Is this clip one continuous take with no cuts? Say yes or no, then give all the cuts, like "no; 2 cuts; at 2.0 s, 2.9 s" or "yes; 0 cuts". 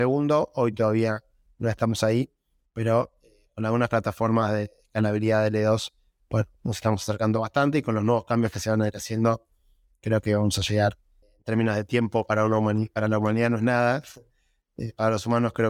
no; 1 cut; at 11.2 s